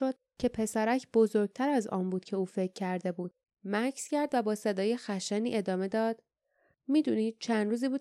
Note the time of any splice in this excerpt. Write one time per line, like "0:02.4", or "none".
0:03.4